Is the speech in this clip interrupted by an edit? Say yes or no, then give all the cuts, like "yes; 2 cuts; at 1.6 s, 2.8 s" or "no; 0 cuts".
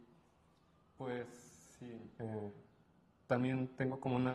no; 0 cuts